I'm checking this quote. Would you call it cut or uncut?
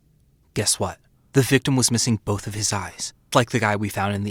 cut